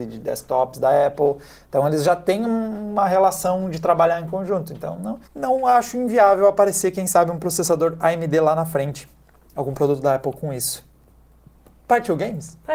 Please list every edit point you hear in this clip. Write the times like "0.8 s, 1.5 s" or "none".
5.2 s